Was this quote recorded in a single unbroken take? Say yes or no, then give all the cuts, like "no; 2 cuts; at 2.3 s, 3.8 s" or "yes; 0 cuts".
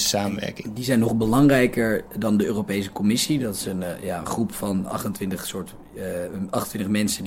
yes; 0 cuts